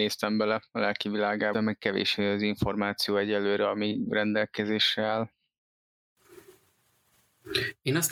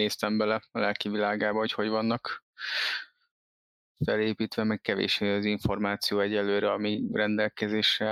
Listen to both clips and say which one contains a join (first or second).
first